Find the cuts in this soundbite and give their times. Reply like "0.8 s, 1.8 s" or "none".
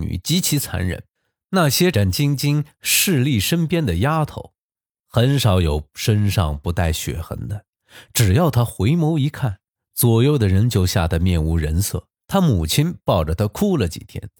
1.9 s, 12.2 s